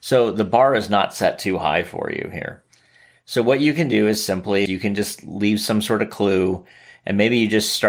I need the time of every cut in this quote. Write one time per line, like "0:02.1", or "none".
0:04.7